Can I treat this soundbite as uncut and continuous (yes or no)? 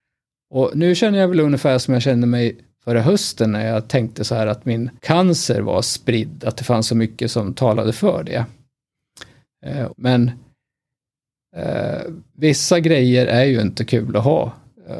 no